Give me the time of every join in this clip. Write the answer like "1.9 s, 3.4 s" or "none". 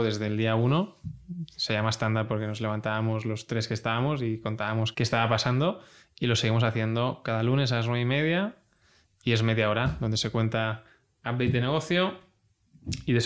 4.9 s